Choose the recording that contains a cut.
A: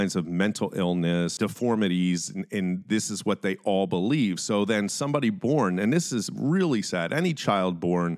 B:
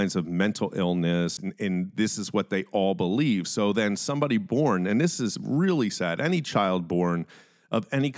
B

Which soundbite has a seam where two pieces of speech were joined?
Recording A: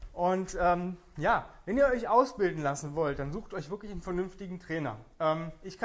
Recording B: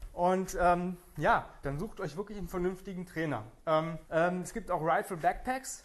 B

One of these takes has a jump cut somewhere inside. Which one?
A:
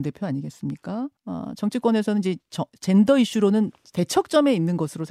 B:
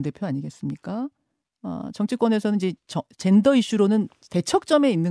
A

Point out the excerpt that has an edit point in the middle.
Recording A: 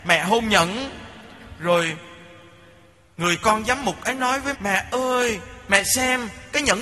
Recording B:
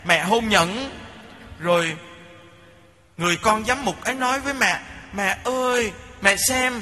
A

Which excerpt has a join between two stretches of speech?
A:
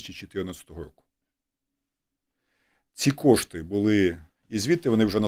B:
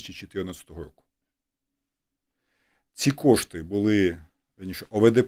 A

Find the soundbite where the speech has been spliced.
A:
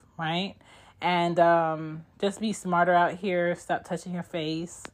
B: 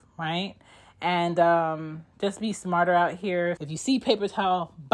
B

